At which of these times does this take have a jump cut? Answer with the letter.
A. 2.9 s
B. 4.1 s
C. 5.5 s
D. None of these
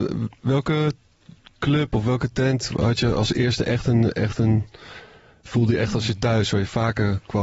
C